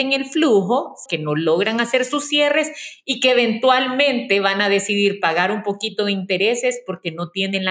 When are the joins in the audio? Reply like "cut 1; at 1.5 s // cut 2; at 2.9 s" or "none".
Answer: cut 1; at 1.1 s

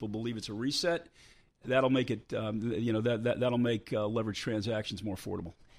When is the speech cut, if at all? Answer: none

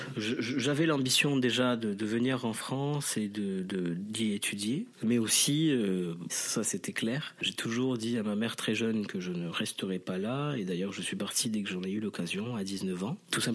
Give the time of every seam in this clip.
cut 1; at 5.0 s // cut 2; at 6.3 s

